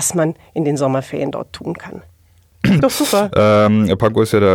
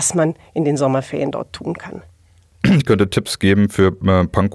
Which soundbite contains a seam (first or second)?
first